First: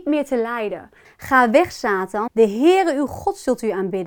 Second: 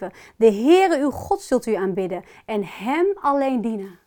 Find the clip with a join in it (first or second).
first